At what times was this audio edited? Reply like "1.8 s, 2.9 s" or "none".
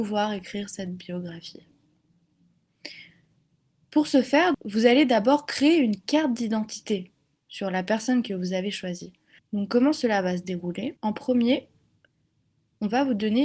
4.5 s, 9.4 s, 11.0 s

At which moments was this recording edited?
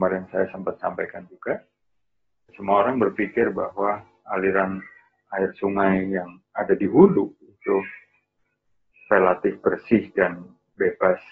2.5 s

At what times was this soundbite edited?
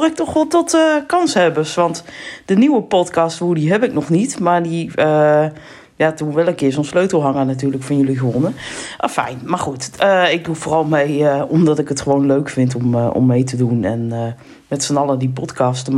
none

